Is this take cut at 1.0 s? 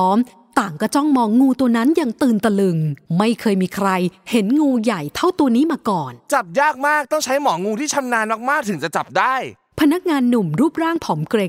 no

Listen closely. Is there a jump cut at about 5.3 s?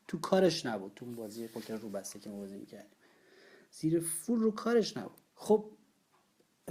yes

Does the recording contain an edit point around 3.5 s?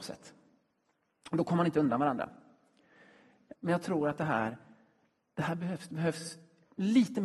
yes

